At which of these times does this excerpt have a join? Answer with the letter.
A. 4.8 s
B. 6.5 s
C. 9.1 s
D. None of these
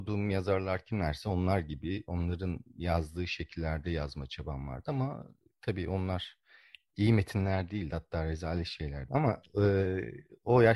C